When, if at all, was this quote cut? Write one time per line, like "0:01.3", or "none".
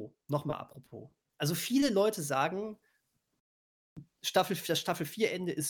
0:01.3